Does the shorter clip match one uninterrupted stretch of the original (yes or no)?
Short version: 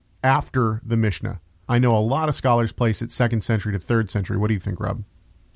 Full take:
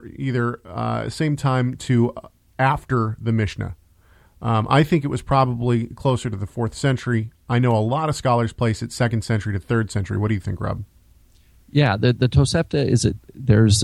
no